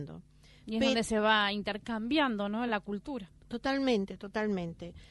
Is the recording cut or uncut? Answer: uncut